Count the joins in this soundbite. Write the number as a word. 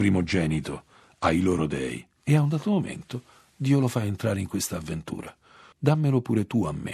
zero